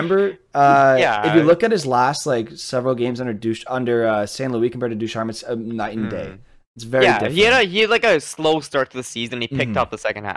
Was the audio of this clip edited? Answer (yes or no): no